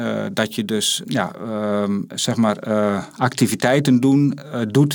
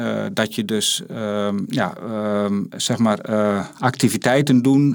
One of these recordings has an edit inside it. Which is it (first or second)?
first